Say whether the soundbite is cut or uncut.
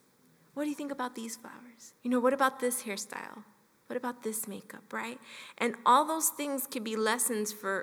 cut